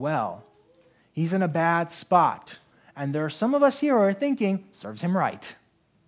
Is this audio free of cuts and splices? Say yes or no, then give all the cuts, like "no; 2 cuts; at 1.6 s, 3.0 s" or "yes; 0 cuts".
yes; 0 cuts